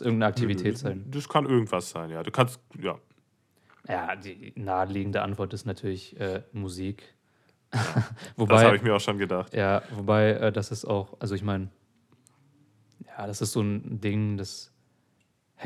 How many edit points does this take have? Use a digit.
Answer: 0